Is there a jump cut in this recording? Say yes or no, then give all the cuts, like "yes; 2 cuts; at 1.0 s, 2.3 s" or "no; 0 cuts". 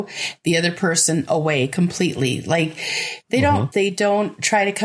yes; 1 cut; at 3.7 s